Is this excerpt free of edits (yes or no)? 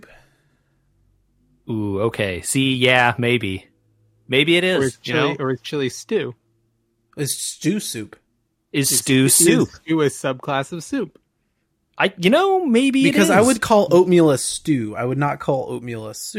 yes